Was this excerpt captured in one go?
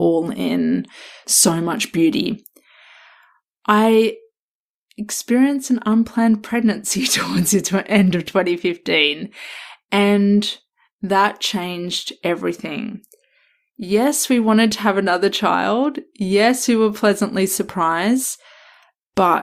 yes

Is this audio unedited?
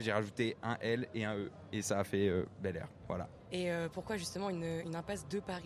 yes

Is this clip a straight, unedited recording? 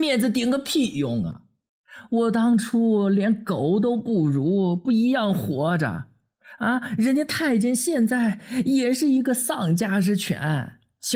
yes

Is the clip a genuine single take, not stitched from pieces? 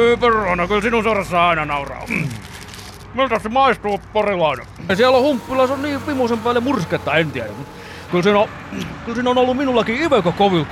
no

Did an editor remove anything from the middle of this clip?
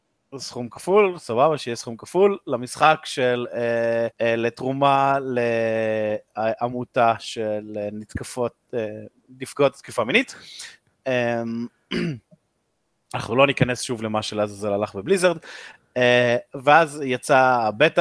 yes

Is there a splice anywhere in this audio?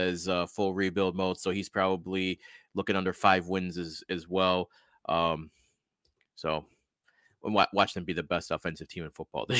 no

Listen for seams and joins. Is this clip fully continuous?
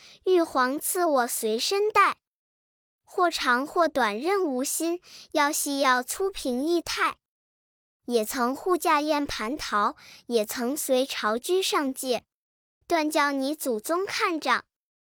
no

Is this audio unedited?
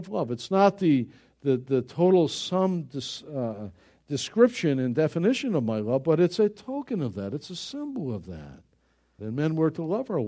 no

